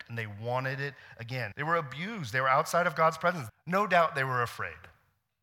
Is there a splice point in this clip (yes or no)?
yes